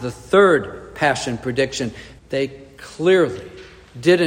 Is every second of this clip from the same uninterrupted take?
no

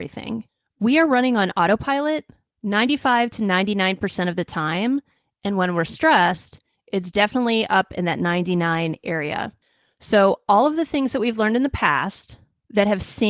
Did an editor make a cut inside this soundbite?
no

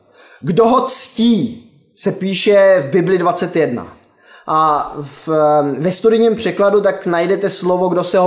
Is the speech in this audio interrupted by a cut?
no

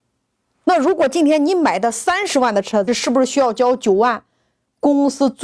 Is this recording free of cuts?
no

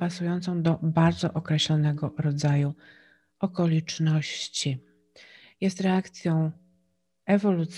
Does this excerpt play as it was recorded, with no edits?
yes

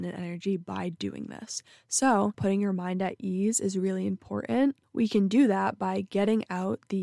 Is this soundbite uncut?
no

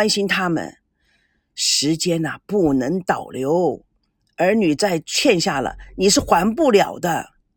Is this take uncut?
yes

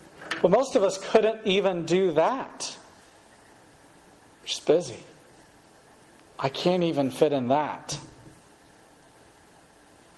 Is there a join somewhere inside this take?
no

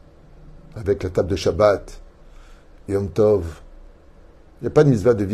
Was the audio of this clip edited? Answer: no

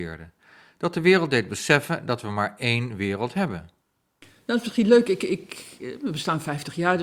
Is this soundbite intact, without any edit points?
yes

